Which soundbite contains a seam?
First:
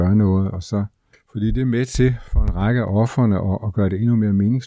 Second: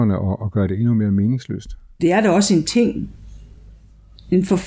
second; 1 cut; at 2.0 s

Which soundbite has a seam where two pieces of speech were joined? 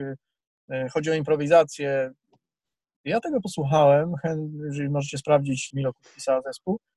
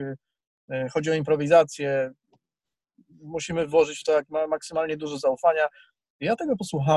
first; 2 cuts; at 3.0 s, 5.7 s

